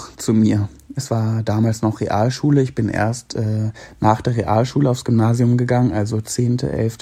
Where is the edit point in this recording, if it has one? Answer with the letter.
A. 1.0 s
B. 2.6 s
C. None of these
A